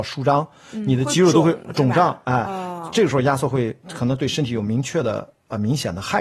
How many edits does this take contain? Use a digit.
1